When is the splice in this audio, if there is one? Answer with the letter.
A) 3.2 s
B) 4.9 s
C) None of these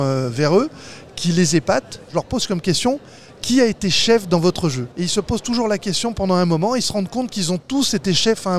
B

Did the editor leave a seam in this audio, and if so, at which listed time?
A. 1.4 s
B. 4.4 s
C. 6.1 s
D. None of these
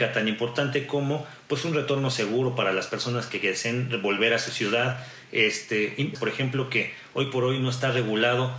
C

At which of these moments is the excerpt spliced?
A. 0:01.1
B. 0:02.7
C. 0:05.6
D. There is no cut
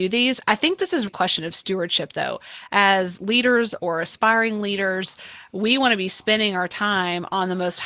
A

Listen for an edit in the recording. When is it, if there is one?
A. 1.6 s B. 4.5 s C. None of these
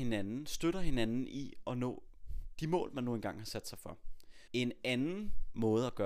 B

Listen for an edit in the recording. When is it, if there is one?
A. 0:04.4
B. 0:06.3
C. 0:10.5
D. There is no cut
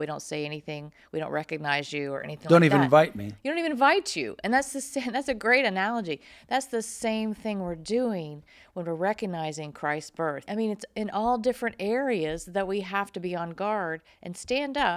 C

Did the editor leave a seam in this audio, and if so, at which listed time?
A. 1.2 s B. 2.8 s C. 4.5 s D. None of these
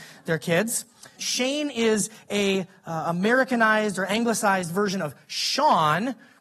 A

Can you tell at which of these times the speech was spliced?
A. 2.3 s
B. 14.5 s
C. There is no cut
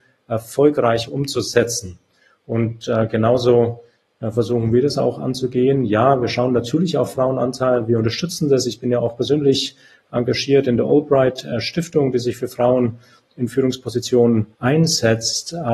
B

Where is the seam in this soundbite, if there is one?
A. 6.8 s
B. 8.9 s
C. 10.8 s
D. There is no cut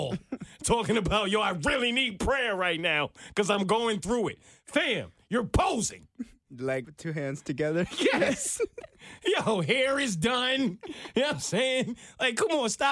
A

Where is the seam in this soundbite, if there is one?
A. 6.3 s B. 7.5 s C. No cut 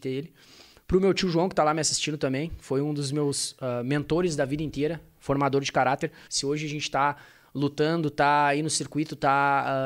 A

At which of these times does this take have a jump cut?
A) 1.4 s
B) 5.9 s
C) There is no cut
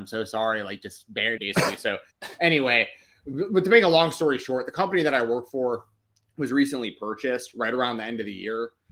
A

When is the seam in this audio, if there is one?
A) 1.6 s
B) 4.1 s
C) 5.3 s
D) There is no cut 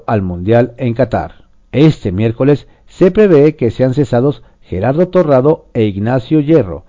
A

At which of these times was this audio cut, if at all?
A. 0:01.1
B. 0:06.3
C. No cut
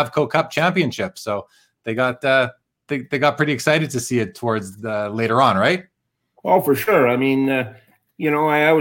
C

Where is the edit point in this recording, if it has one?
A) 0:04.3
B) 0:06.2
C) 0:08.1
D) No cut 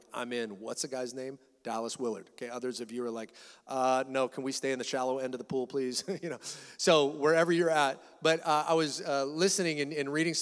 D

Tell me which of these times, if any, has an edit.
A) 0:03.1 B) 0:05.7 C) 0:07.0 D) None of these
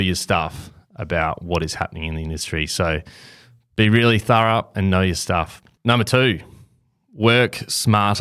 D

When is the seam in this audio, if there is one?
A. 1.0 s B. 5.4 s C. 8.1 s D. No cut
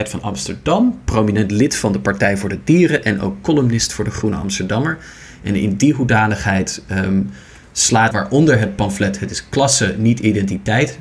C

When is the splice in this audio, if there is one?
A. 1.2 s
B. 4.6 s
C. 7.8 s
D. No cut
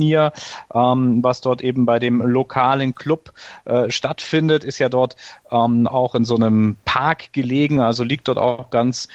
D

